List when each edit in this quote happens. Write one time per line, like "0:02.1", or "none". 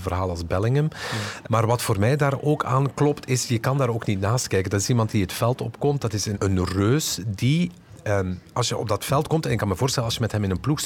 0:06.3